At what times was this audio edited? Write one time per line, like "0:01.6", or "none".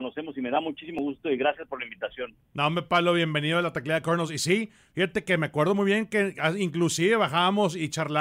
none